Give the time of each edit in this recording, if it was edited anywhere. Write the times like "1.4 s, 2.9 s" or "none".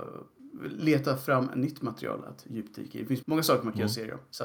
3.2 s